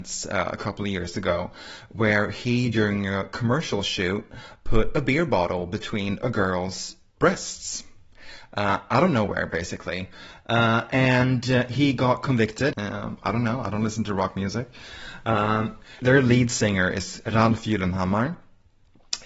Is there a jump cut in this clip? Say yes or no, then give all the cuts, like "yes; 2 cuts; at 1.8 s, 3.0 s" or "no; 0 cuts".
yes; 2 cuts; at 12.7 s, 16.0 s